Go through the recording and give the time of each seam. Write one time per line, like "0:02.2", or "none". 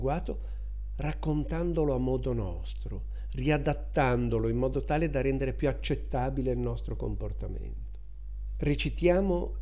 none